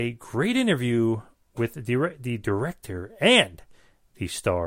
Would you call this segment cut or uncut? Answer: uncut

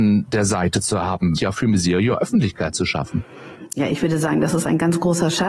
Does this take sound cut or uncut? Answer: cut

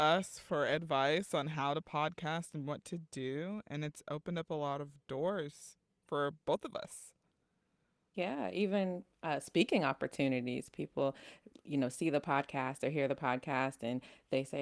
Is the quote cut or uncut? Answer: uncut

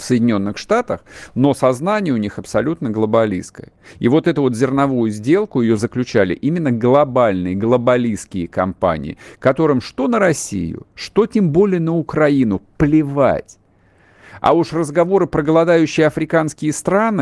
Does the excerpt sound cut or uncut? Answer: cut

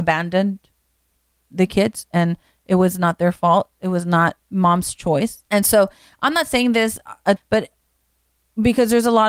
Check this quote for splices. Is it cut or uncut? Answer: cut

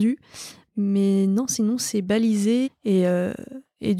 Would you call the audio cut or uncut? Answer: cut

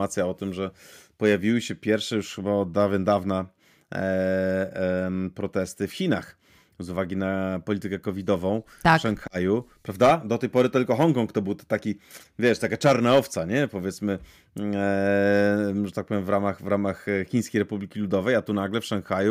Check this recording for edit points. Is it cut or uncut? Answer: uncut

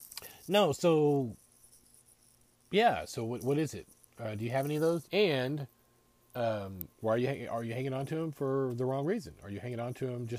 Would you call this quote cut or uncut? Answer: cut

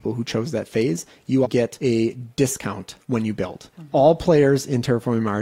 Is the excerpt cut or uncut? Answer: cut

